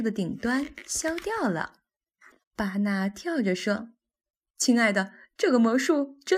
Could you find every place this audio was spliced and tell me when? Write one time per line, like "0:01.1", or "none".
0:02.4